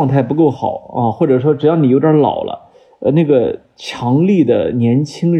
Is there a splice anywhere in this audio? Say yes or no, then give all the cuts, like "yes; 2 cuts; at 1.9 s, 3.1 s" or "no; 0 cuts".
no; 0 cuts